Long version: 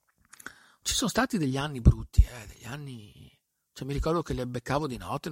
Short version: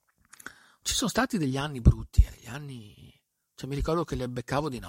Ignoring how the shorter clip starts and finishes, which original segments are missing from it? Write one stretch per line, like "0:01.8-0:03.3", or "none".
0:02.3-0:02.5